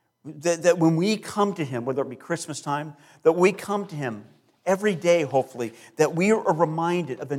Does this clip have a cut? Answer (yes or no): no